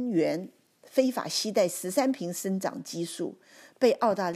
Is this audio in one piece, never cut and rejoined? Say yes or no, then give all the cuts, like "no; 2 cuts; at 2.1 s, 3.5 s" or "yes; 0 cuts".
yes; 0 cuts